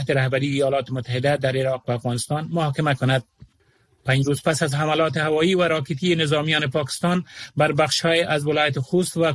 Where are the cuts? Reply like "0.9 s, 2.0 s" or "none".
none